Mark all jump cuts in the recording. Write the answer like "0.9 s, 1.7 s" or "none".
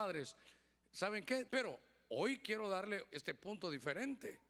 1.5 s, 3.1 s